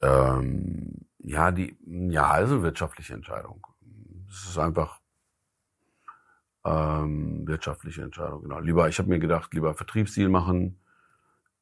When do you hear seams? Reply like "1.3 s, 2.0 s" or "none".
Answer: none